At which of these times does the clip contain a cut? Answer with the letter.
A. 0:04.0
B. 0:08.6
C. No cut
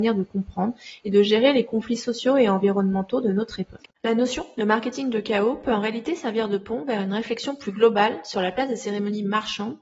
A